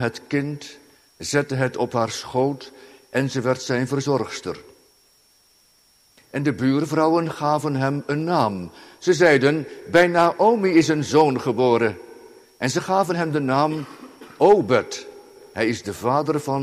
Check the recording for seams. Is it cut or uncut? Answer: uncut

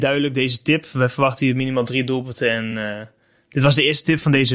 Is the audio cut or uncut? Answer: uncut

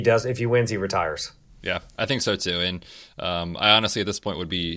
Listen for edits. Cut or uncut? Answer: uncut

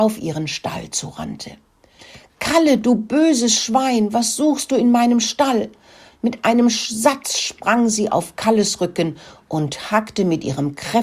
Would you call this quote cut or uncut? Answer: uncut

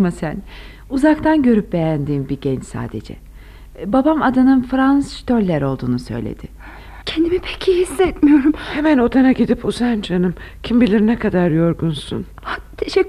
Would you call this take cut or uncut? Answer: cut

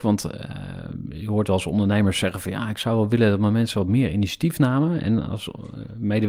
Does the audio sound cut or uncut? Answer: uncut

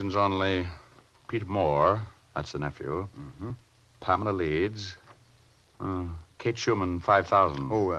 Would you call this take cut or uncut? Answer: uncut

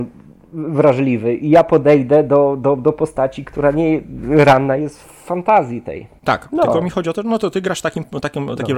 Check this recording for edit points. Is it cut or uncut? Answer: cut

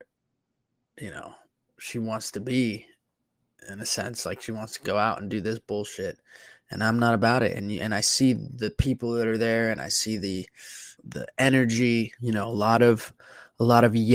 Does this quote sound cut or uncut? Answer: cut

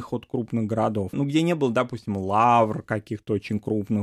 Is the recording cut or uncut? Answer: cut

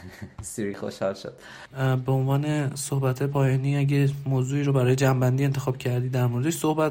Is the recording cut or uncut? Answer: cut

